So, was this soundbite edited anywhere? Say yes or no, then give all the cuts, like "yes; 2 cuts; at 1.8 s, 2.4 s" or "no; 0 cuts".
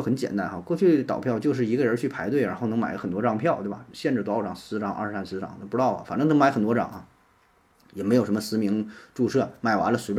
yes; 1 cut; at 3.9 s